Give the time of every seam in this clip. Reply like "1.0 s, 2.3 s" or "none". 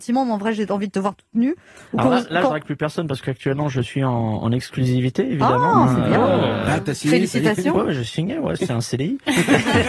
none